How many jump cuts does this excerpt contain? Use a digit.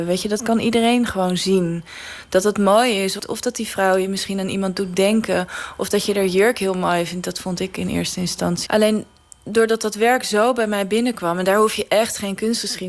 2